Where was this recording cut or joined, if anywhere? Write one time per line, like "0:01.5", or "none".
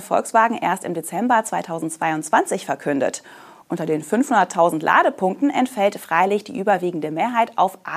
none